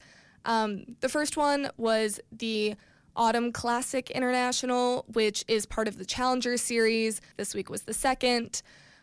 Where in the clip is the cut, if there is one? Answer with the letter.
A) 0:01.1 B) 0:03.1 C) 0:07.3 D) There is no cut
C